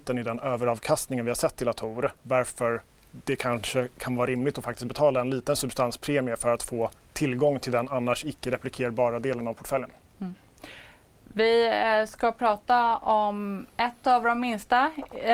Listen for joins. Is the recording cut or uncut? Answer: uncut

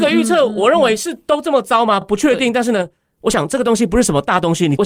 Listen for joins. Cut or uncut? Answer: uncut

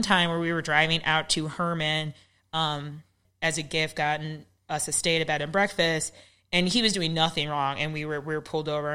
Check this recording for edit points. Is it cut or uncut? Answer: cut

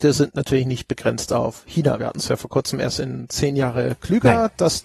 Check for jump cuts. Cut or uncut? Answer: uncut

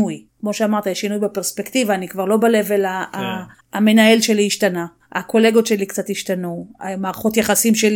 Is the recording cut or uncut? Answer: cut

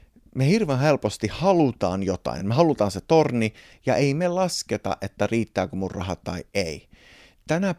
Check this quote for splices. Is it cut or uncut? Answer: uncut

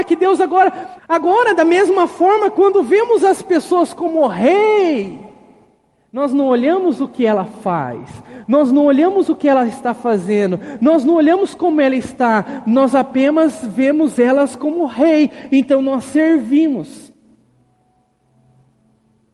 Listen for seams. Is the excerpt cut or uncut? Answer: cut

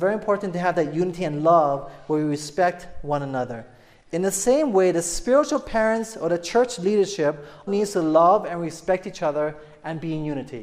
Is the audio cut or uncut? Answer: cut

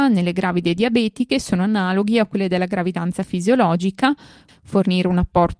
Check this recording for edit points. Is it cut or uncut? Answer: cut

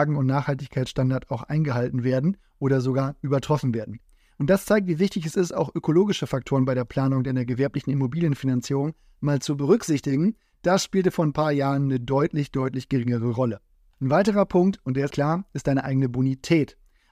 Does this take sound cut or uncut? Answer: cut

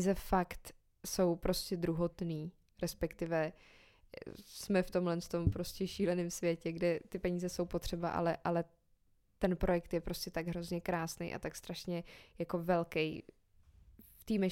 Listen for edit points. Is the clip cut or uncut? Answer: uncut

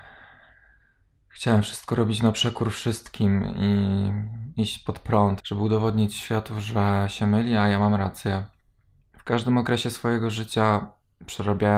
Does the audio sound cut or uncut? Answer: cut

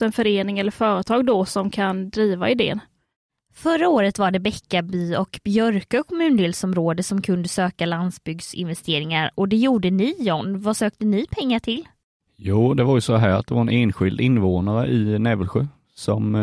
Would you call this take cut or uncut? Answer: uncut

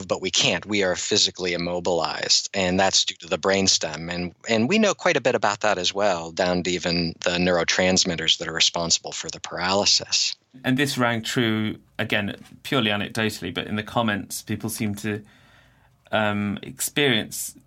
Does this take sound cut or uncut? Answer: uncut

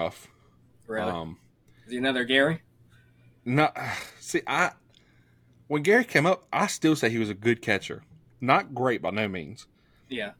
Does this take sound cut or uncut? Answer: uncut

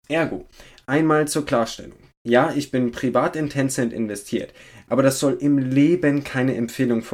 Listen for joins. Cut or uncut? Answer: uncut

